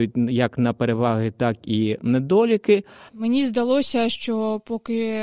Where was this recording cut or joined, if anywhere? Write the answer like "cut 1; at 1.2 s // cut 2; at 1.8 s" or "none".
cut 1; at 3.1 s

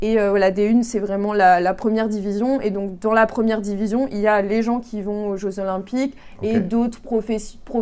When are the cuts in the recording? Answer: none

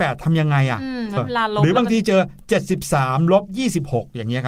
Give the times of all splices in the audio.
cut 1; at 1.2 s

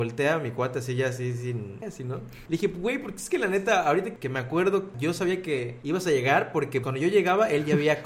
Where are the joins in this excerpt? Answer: cut 1; at 1.8 s // cut 2; at 6.8 s

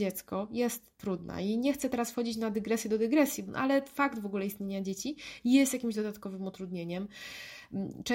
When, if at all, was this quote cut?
cut 1; at 3.4 s

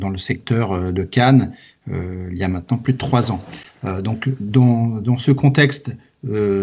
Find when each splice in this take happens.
none

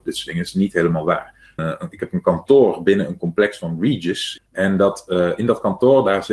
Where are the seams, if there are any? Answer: cut 1; at 1.6 s // cut 2; at 4.4 s

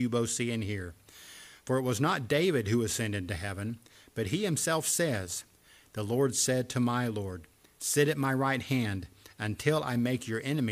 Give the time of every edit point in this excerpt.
none

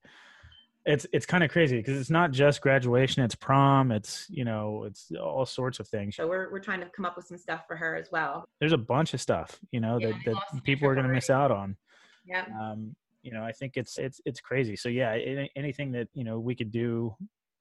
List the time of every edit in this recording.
cut 1; at 6.2 s // cut 2; at 8.4 s // cut 3; at 14.0 s

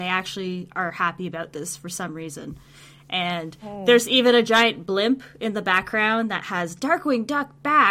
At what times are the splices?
none

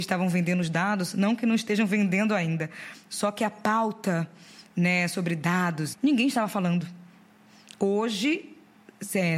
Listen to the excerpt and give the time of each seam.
cut 1; at 5.9 s

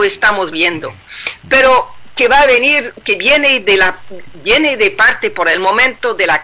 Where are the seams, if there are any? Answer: none

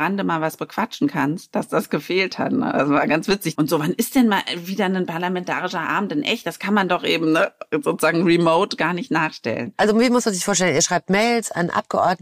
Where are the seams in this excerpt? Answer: cut 1; at 3.5 s

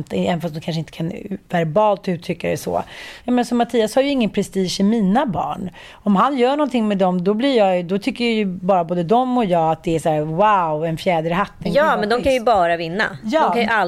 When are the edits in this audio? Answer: cut 1; at 3.2 s

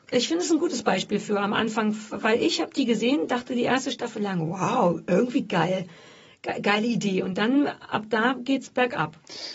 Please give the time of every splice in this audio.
none

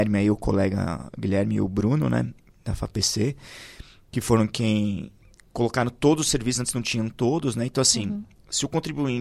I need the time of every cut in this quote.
none

